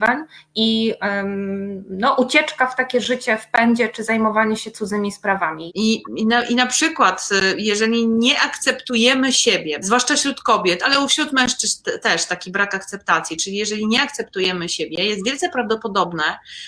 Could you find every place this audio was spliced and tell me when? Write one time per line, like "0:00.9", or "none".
0:05.7
0:09.8